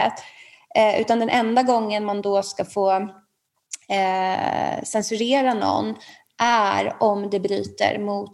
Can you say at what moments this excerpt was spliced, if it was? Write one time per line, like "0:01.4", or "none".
none